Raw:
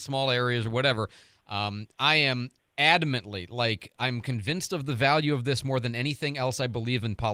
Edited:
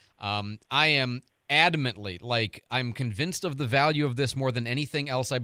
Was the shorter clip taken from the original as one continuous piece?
yes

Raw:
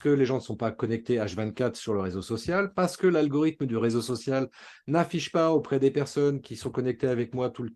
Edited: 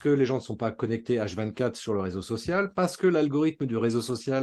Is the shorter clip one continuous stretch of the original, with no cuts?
yes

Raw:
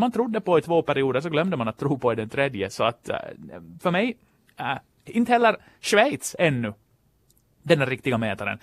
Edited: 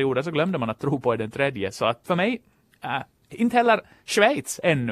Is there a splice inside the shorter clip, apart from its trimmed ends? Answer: yes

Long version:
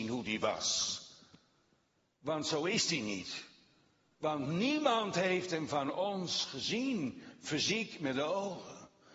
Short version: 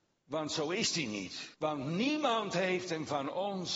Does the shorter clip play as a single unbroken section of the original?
no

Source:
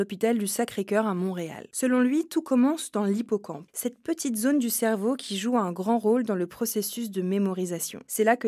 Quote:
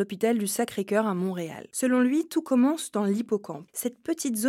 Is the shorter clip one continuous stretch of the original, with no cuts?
yes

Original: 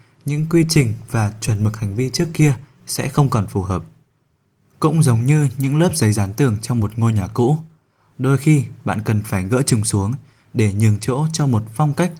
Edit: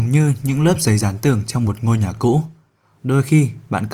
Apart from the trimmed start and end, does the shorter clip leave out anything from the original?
no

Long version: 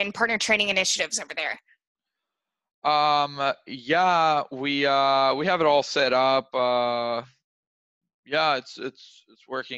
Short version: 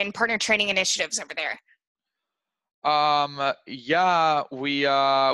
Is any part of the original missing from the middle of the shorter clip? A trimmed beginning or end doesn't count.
no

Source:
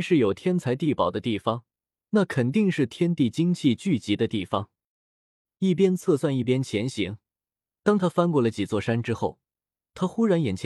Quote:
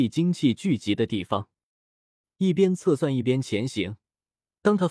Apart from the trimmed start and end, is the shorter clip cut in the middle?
no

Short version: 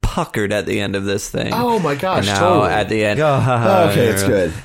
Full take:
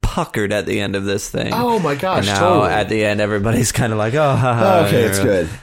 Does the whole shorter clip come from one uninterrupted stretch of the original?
no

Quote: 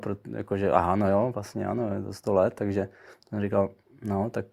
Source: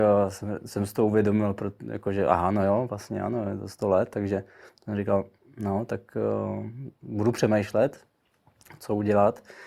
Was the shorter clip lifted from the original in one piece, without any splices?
yes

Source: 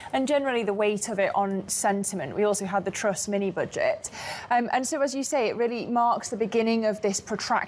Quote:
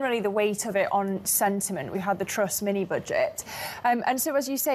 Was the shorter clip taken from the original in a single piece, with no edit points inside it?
no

